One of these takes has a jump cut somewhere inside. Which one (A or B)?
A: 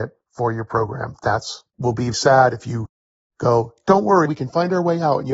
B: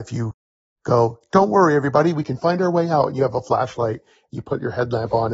A